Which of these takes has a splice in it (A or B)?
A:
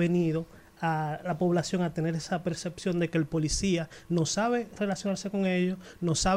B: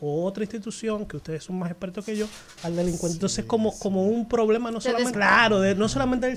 B